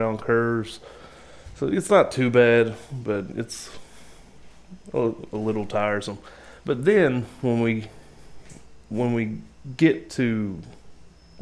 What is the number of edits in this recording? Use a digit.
0